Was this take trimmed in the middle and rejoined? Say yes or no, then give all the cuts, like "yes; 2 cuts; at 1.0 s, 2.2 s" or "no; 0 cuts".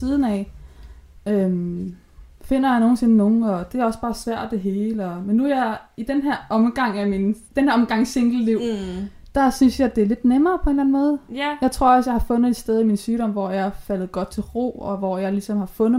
yes; 1 cut; at 7.4 s